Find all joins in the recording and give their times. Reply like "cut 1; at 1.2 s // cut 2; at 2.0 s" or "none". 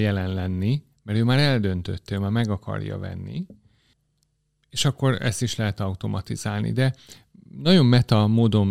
none